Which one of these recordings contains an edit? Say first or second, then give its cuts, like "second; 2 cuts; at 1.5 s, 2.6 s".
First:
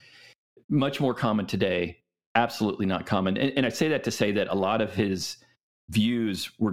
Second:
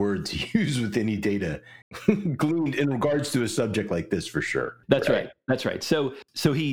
second; 2 cuts; at 1.8 s, 4.8 s